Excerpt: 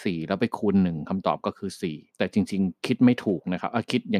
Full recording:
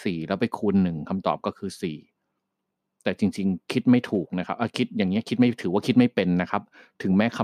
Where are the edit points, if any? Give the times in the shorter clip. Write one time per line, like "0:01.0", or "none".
0:02.1